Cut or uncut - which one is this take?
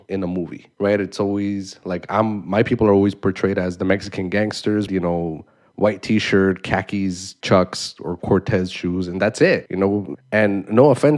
cut